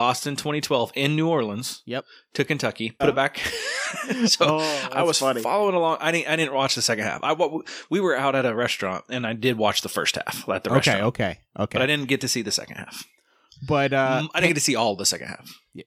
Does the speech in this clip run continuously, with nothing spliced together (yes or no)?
no